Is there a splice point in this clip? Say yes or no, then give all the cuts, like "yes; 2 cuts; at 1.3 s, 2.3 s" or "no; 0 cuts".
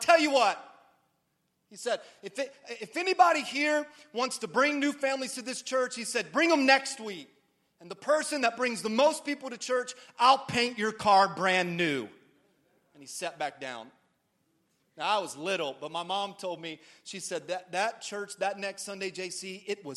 no; 0 cuts